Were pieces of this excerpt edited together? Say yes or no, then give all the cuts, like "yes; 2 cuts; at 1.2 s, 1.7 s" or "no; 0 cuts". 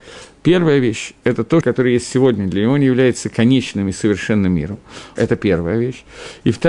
yes; 2 cuts; at 1.6 s, 5.2 s